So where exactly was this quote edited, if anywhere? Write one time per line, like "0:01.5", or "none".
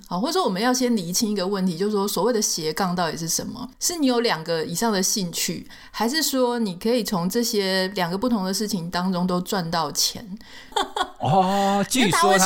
0:03.7
0:10.7